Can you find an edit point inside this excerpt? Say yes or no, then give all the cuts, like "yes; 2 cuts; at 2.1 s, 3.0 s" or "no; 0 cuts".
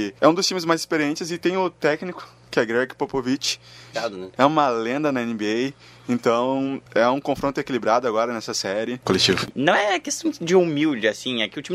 yes; 2 cuts; at 3.9 s, 9.0 s